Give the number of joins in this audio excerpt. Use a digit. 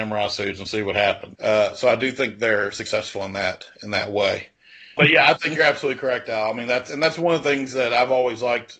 2